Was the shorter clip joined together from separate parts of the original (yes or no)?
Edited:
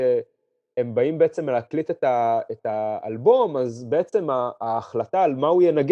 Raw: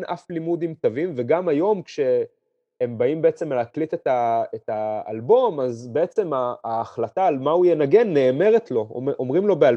no